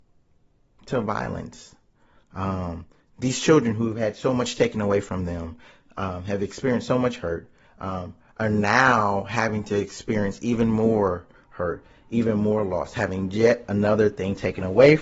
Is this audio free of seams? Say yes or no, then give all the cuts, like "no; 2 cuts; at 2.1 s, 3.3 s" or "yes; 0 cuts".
yes; 0 cuts